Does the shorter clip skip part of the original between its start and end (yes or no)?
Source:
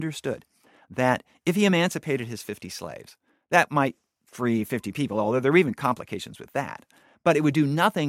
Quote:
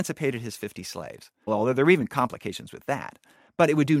yes